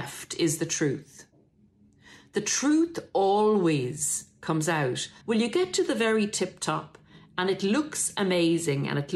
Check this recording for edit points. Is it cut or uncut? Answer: cut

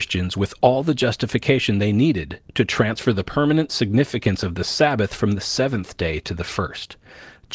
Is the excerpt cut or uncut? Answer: uncut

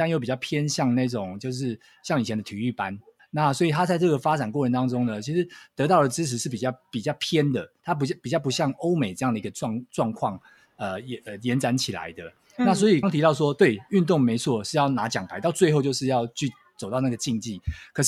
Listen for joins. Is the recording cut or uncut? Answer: cut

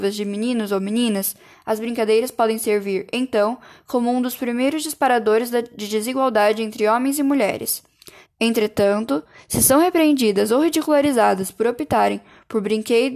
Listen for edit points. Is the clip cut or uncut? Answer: cut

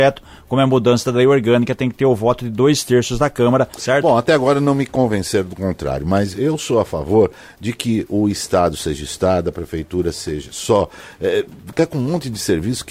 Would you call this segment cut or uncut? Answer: cut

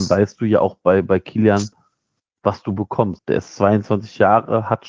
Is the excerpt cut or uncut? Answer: cut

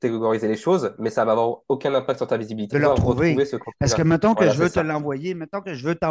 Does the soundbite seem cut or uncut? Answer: cut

